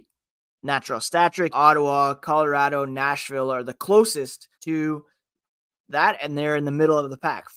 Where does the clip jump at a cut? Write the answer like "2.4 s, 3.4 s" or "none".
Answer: 1.5 s, 4.5 s